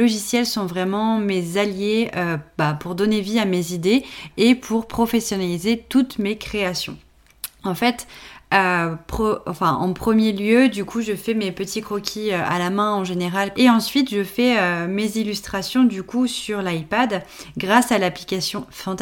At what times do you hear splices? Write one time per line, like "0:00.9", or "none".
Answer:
0:13.5